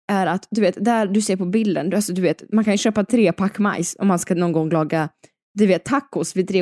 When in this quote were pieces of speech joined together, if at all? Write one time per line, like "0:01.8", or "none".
none